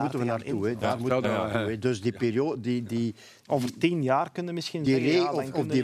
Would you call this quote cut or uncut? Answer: uncut